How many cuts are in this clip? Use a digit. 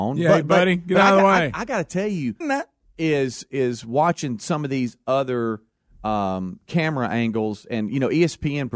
1